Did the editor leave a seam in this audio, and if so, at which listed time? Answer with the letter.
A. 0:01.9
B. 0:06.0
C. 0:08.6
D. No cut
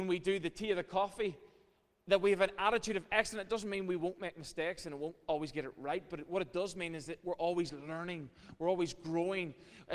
D